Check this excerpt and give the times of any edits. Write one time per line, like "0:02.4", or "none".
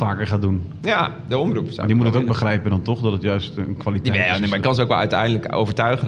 none